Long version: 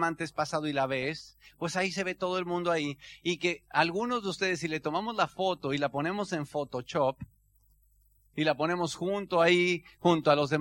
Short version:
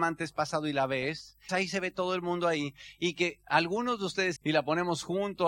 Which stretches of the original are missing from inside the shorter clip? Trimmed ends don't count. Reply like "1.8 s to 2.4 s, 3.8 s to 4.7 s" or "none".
1.5 s to 1.7 s, 4.6 s to 8.3 s